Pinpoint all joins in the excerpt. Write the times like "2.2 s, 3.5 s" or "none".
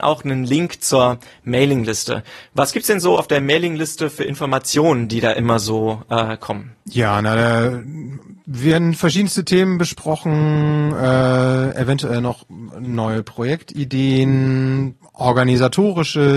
6.8 s, 15.0 s